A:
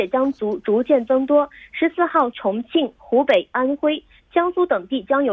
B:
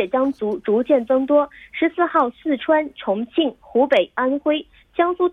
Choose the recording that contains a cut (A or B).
A